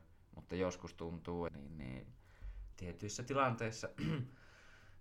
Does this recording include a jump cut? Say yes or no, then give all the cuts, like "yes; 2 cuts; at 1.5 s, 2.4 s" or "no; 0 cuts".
yes; 2 cuts; at 1.5 s, 2.7 s